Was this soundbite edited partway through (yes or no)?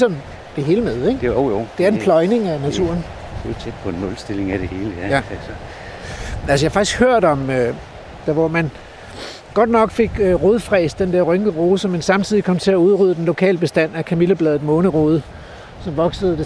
yes